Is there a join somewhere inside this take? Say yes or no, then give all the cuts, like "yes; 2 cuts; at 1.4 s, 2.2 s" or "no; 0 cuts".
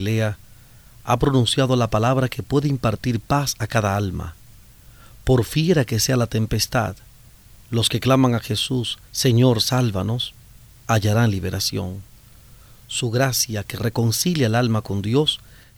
yes; 1 cut; at 9.1 s